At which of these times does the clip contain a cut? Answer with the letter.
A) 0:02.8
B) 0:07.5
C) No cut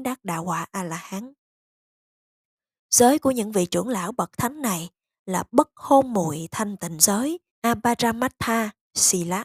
B